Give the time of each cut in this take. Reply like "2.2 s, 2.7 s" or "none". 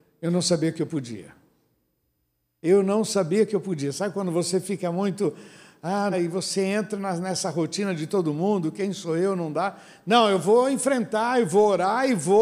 6.1 s